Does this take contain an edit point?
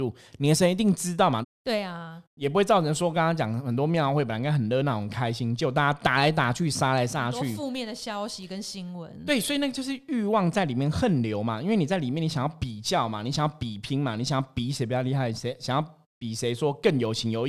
yes; 2 cuts; at 1.4 s, 15.3 s

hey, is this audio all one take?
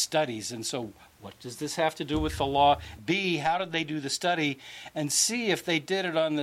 no; 1 cut; at 3.0 s

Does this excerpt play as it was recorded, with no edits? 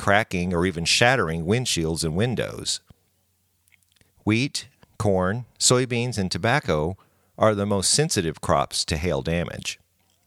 yes; 0 cuts

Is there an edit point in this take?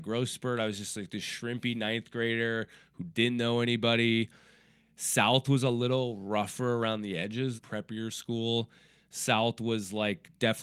yes; 1 cut; at 7.6 s

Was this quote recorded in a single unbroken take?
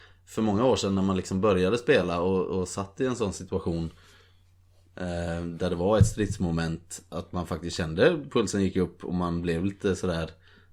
yes; 0 cuts

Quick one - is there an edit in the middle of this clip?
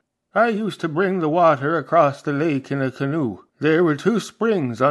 yes; 1 cut; at 3.5 s

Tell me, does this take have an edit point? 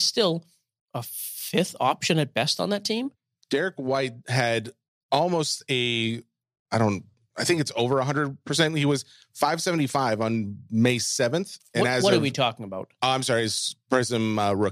no; 0 cuts

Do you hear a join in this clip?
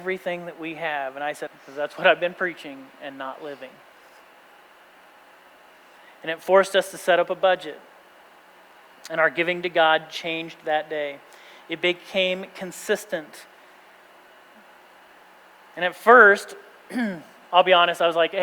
yes; 1 cut; at 1.5 s

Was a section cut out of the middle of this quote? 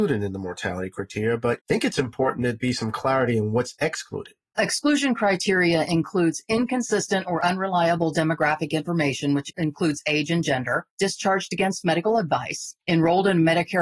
yes; 1 cut; at 4.5 s

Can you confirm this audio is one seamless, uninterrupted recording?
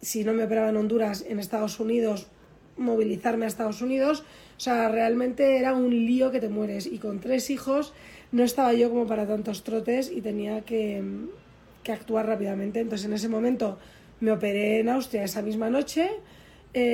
yes; 0 cuts

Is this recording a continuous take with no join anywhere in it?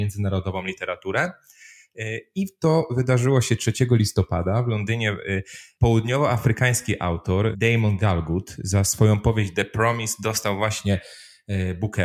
yes; 0 cuts

